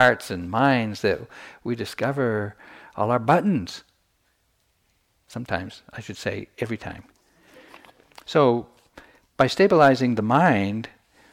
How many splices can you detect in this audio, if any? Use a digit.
1